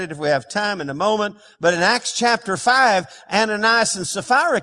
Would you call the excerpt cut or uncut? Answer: uncut